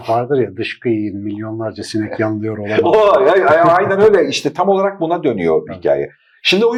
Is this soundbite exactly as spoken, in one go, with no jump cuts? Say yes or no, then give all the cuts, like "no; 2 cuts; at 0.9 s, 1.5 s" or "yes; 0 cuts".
no; 1 cut; at 5.7 s